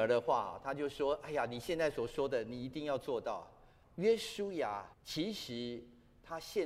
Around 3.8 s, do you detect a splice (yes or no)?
yes